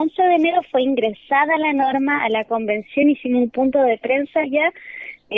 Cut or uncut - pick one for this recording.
uncut